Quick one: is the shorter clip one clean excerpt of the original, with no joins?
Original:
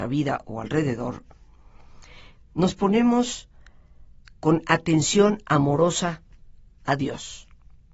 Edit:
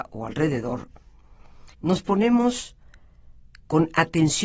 no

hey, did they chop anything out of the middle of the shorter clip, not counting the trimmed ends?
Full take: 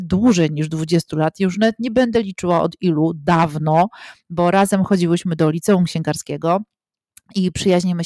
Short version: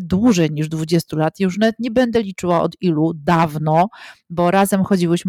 no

